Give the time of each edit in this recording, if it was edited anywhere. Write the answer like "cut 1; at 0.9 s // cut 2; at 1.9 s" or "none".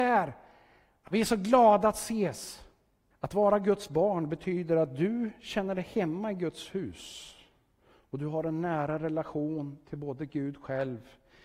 cut 1; at 1.1 s // cut 2; at 3.1 s

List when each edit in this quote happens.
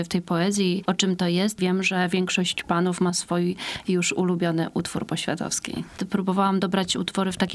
cut 1; at 1.6 s // cut 2; at 6.0 s

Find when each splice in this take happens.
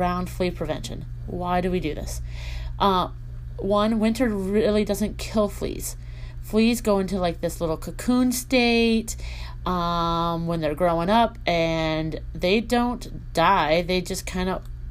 none

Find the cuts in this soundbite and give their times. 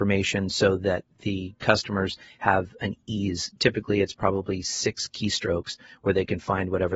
none

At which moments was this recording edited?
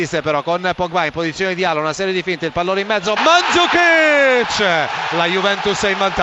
cut 1; at 3.2 s

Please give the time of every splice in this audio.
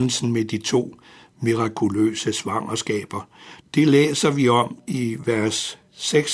cut 1; at 3.6 s

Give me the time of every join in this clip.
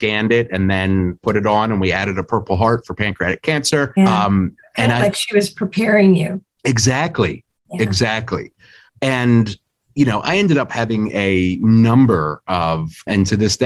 cut 1; at 4.0 s

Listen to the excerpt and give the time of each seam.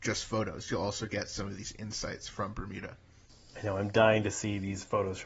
none

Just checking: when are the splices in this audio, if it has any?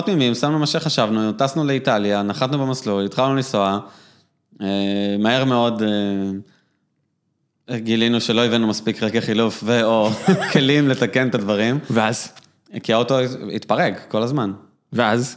none

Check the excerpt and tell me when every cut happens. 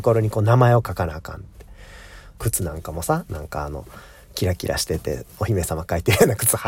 cut 1; at 2.4 s

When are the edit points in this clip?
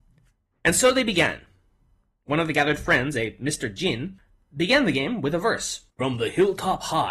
cut 1; at 5.9 s

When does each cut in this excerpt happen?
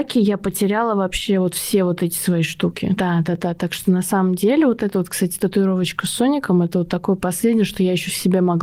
cut 1; at 3.0 s

